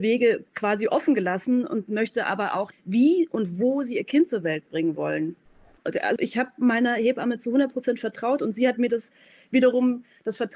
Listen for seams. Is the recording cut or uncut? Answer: cut